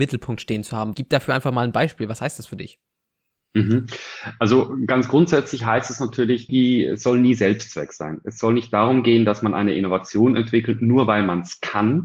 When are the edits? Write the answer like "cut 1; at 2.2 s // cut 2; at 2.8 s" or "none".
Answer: cut 1; at 0.9 s // cut 2; at 6.5 s